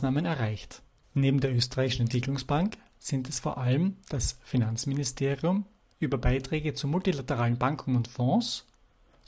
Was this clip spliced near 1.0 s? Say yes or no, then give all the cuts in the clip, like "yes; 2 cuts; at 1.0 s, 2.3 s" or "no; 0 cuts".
yes; 1 cut; at 1.0 s